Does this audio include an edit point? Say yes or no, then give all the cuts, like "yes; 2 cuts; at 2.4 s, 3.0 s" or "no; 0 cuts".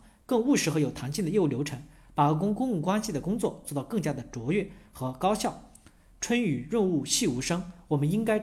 no; 0 cuts